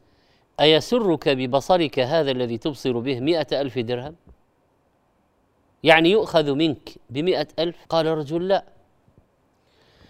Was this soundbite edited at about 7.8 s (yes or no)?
yes